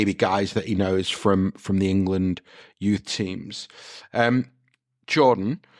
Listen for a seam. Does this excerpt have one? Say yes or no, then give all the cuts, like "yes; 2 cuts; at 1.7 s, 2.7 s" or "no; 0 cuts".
no; 0 cuts